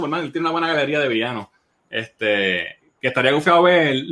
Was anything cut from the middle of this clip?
no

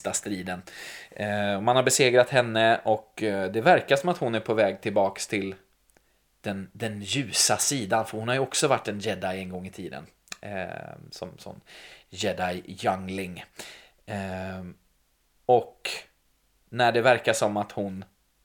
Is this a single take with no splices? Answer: yes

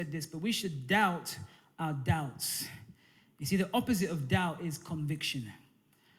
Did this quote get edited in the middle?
no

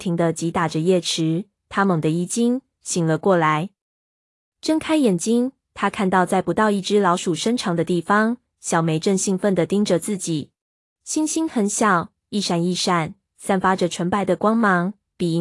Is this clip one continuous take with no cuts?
no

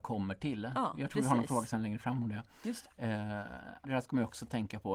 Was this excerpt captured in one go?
no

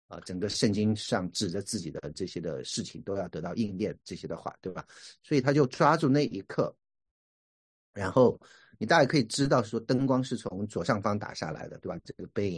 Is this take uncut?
yes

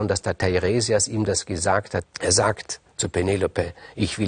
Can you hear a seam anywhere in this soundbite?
yes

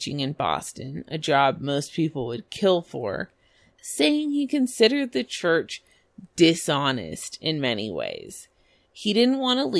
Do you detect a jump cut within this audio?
no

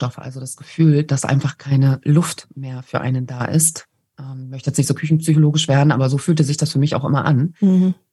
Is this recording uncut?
yes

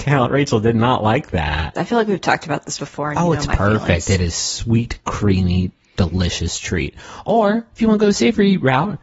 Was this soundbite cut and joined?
yes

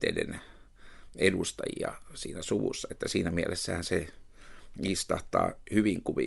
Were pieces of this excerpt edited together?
no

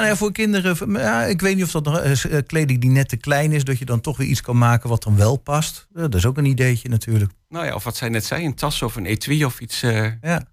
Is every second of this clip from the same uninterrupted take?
yes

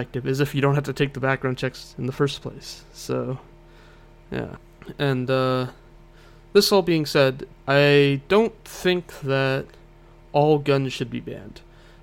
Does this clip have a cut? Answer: no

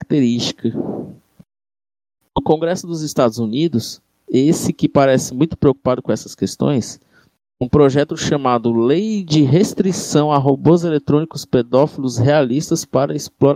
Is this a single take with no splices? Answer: no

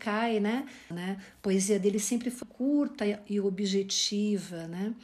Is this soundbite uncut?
no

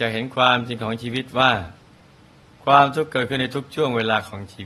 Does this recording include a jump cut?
no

